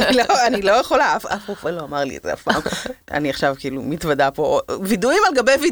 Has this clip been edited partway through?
yes; 1 cut; at 3.0 s

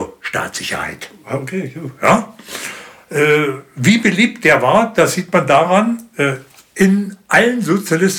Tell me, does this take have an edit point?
no; 0 cuts

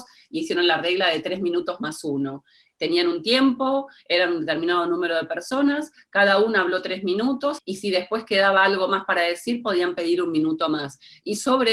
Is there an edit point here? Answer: yes; 1 cut; at 7.6 s

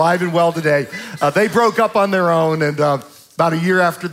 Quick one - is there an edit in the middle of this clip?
no; 0 cuts

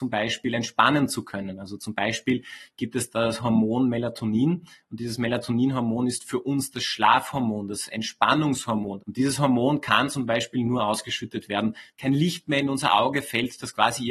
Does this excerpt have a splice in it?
yes; 2 cuts; at 9.0 s, 11.9 s

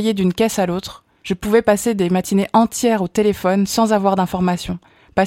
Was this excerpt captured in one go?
yes; 0 cuts

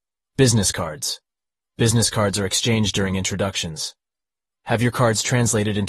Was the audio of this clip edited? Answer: no; 0 cuts

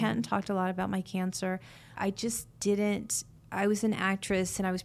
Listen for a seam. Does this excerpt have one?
yes; 1 cut; at 2.0 s

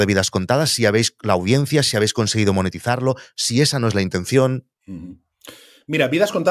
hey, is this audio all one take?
yes; 0 cuts

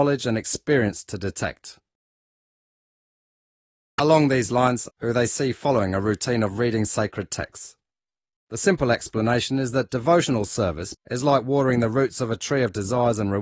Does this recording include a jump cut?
yes; 3 cuts; at 4.9 s, 8.4 s, 10.9 s

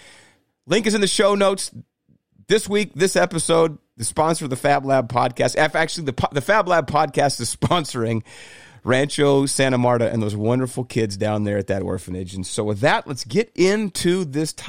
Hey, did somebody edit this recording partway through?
no; 0 cuts

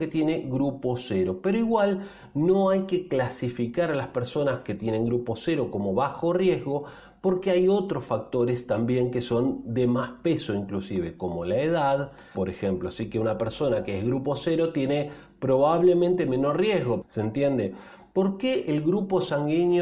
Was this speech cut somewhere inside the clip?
yes; 2 cuts; at 12.3 s, 17.0 s

